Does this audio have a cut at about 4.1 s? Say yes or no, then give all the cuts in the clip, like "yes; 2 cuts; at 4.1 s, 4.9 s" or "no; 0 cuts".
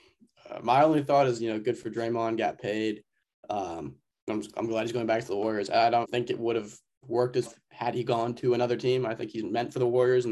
no; 2 cuts; at 6.0 s, 7.5 s